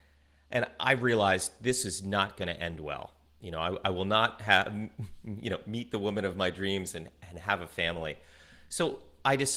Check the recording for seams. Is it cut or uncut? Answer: uncut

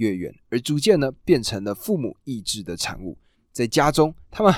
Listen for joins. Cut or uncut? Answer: cut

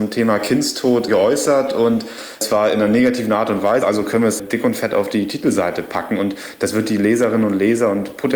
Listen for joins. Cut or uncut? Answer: cut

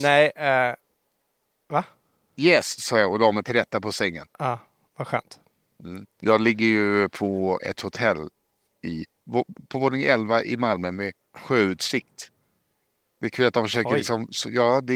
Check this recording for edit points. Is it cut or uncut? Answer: cut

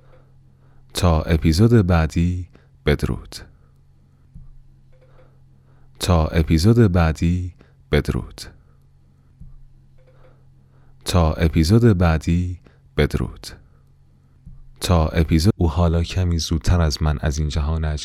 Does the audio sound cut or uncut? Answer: cut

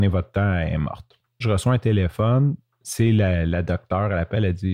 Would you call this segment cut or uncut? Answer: cut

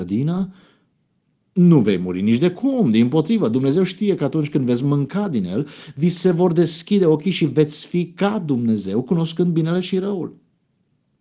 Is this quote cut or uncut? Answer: uncut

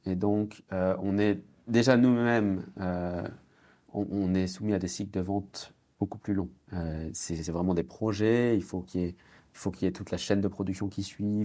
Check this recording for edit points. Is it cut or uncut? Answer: cut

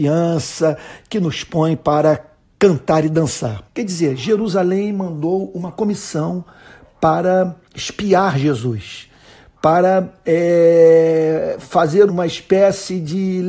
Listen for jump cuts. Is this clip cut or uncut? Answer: cut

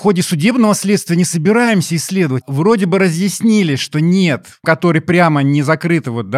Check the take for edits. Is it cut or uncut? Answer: cut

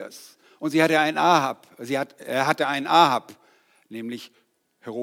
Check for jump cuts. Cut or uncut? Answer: uncut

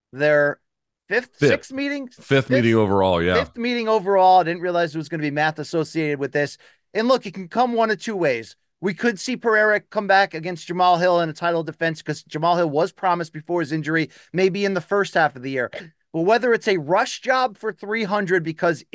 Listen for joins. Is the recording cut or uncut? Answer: uncut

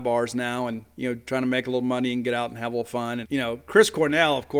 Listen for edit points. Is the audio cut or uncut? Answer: cut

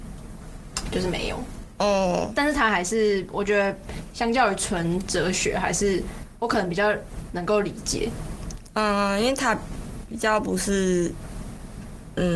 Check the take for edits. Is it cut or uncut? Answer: uncut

